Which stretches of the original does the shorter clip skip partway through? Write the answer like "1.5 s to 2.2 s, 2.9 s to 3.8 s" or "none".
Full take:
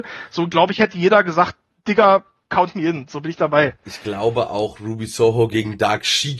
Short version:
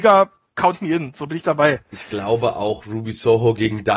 none

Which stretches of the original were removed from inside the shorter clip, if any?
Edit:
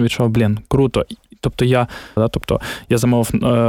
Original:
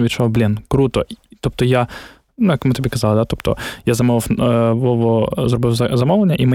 2.2 s to 3.1 s

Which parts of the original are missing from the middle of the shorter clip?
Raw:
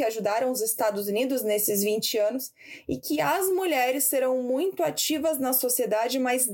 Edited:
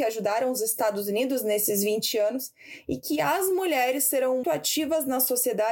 4.4 s to 4.8 s

